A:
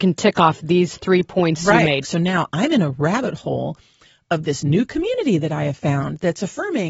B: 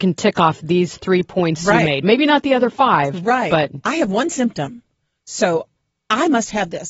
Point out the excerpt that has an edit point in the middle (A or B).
A